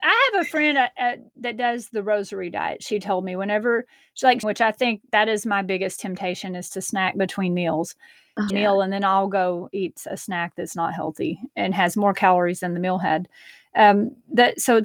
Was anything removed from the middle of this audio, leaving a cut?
yes; 2 cuts; at 4.4 s, 8.5 s

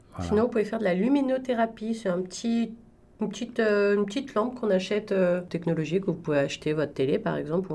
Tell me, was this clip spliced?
yes; 1 cut; at 5.5 s

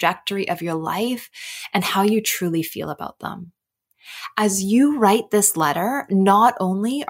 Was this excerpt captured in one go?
yes; 0 cuts

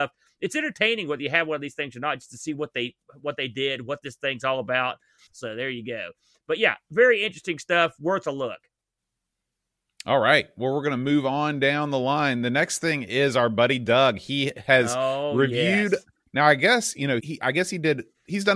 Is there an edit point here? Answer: yes; 2 cuts; at 5.3 s, 17.2 s

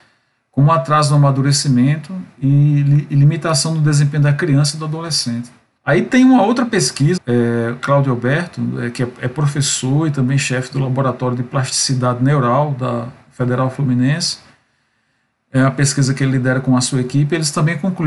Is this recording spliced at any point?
yes; 2 cuts; at 5.8 s, 7.2 s

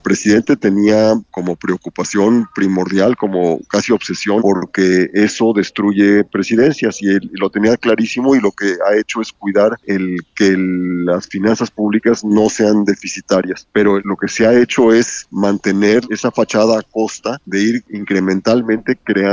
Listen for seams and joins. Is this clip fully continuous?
no; 1 cut; at 4.4 s

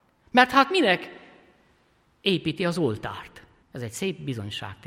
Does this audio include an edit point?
yes; 1 cut; at 3.6 s

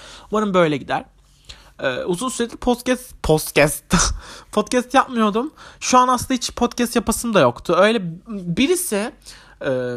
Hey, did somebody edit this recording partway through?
no; 0 cuts

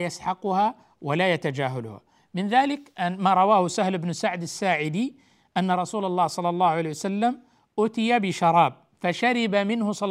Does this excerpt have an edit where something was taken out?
no; 0 cuts

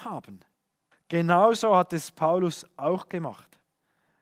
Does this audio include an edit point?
yes; 1 cut; at 0.9 s

